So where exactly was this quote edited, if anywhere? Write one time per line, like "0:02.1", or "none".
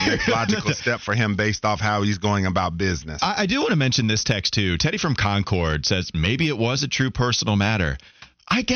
none